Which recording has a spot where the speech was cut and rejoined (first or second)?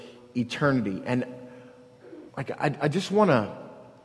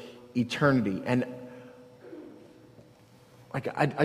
first